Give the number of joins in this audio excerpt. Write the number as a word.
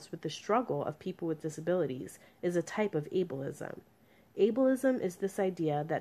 one